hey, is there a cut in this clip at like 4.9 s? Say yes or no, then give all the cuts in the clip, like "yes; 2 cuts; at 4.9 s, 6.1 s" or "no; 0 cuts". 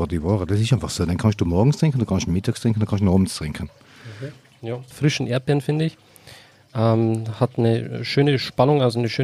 yes; 1 cut; at 4.9 s